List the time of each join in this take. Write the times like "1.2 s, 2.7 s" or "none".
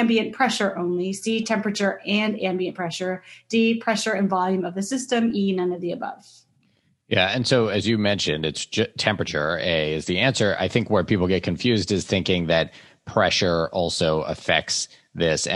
none